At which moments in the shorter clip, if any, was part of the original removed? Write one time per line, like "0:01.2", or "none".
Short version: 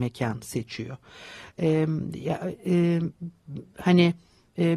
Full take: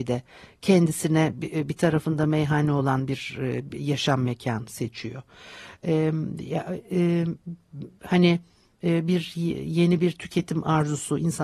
none